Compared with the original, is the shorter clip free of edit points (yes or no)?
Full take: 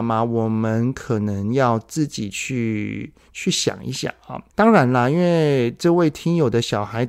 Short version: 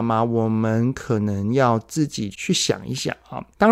no